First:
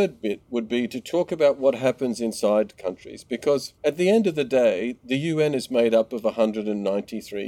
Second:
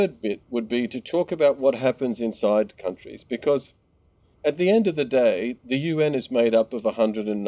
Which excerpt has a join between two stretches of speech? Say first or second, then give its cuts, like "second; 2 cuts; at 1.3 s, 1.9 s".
first; 1 cut; at 3.8 s